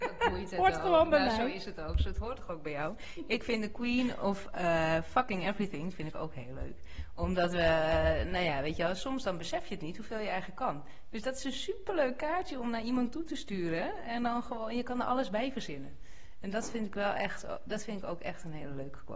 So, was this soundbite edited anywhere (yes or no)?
no